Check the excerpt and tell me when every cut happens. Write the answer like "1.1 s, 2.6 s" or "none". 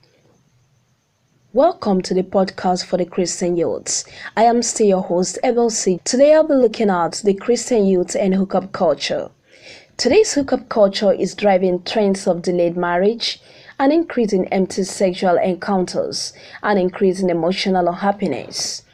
6.0 s

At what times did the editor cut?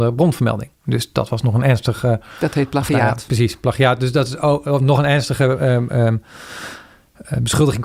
none

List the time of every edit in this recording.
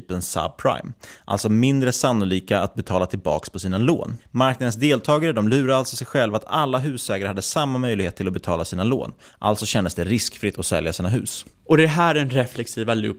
none

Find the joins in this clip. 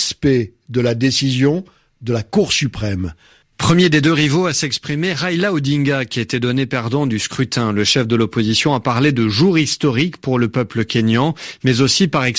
3.4 s

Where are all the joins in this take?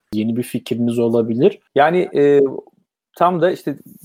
1.7 s

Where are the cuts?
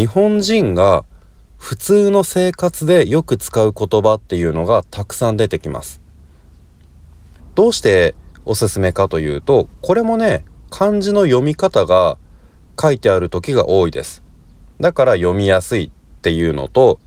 7.4 s

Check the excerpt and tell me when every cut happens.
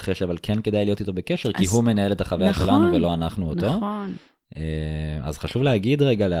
none

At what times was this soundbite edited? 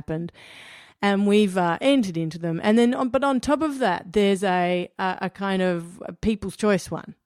none

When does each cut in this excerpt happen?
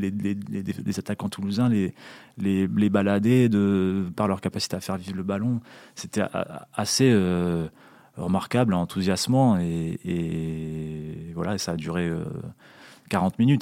4.1 s

